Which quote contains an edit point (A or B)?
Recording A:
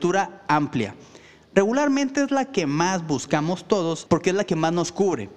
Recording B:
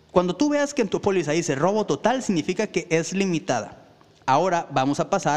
A